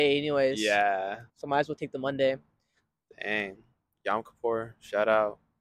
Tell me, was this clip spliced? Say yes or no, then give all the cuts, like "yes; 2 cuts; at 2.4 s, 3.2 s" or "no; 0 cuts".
yes; 1 cut; at 1.3 s